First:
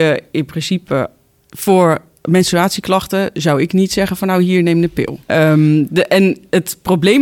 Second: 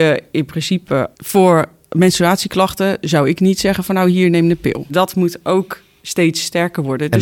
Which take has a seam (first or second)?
second